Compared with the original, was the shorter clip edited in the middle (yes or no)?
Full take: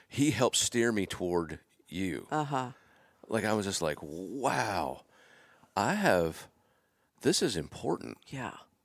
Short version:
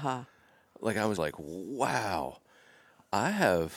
yes